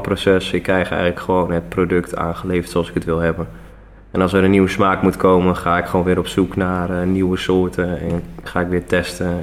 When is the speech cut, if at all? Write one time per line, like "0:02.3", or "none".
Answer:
none

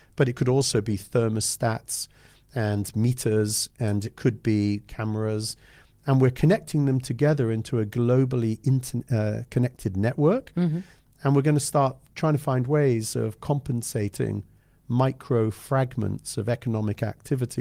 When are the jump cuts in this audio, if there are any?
none

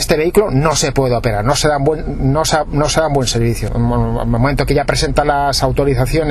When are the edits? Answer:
0:03.7

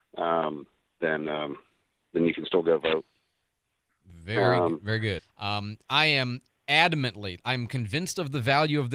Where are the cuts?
0:05.2
0:07.4

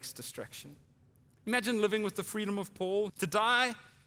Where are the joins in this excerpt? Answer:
0:03.1

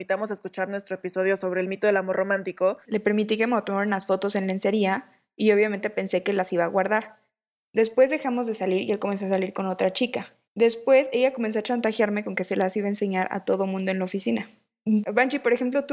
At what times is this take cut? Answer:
0:02.8
0:10.5
0:15.0

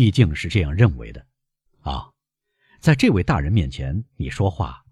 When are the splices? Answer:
0:01.7

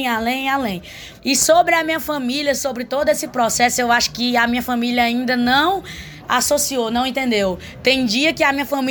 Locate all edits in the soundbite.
0:01.2

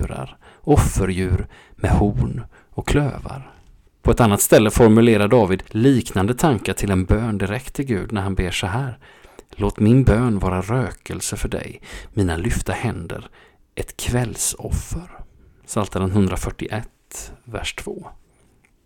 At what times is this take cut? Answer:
0:03.9

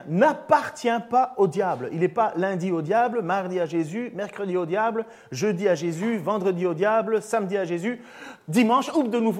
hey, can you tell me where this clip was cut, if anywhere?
none

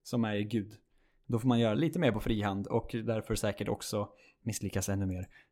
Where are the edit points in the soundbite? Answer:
0:01.7

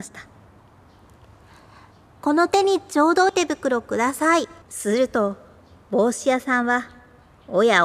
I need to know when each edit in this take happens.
0:03.3
0:04.6

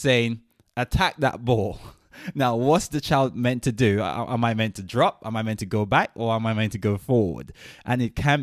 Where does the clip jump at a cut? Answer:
none

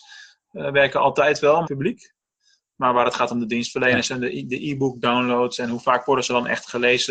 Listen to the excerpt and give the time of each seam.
0:01.6

